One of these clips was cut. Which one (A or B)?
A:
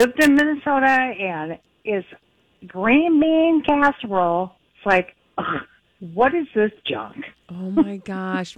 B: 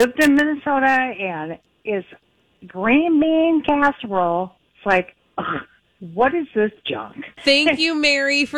B